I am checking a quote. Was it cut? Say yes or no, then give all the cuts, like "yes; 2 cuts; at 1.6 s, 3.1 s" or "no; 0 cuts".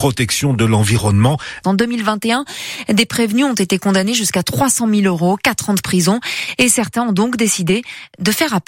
yes; 1 cut; at 1.6 s